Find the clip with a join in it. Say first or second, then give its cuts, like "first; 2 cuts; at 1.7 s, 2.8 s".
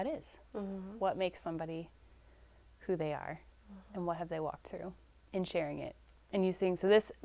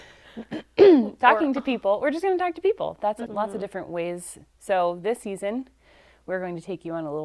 second; 1 cut; at 3.3 s